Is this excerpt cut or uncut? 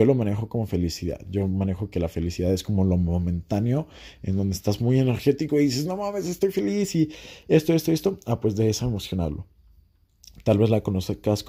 uncut